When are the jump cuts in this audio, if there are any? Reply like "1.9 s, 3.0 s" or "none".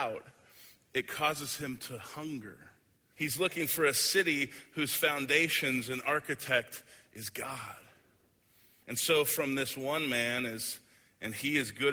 3.1 s, 8.8 s